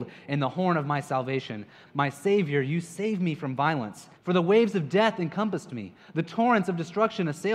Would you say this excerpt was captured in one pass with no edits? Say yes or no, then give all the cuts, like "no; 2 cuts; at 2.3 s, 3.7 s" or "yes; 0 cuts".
no; 2 cuts; at 1.8 s, 4.1 s